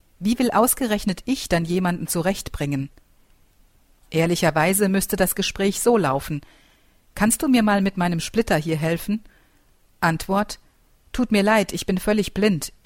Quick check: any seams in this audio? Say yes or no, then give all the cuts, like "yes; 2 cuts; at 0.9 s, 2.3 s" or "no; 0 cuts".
no; 0 cuts